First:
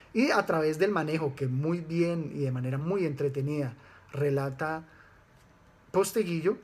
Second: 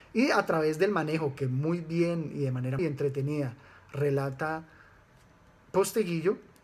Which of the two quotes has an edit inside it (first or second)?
second